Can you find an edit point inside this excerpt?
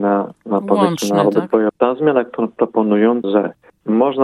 yes; 2 cuts; at 1.7 s, 3.2 s

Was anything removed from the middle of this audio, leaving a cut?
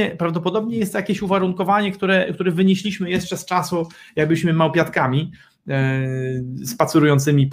no; 0 cuts

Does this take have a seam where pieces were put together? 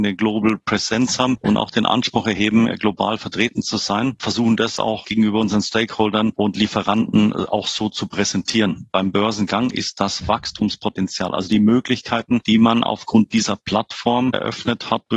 yes; 1 cut; at 8.9 s

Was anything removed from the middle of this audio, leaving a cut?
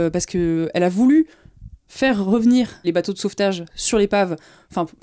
yes; 1 cut; at 2.8 s

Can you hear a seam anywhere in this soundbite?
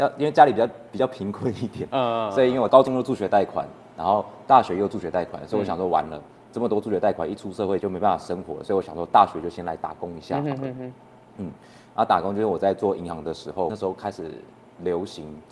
yes; 1 cut; at 7.8 s

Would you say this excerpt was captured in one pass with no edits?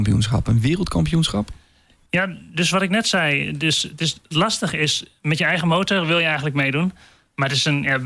yes; 0 cuts

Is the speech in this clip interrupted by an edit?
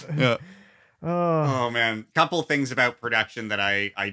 yes; 1 cut; at 2.1 s

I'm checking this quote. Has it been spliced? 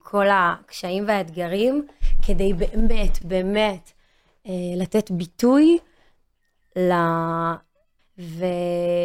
yes; 2 cuts; at 3.2 s, 8.0 s

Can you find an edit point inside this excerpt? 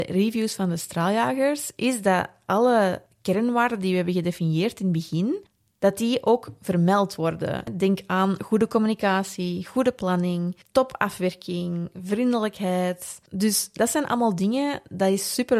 no; 0 cuts

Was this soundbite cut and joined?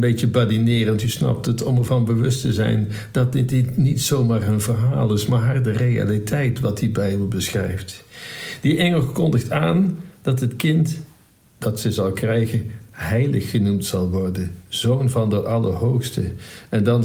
no; 0 cuts

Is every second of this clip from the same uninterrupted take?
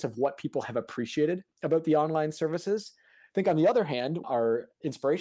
no; 1 cut; at 4.2 s

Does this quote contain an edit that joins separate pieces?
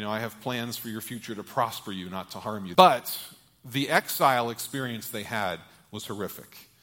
yes; 1 cut; at 2.7 s

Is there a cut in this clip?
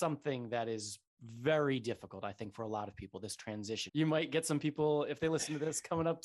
yes; 1 cut; at 3.9 s

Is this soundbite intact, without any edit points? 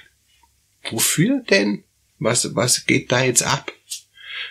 yes; 0 cuts

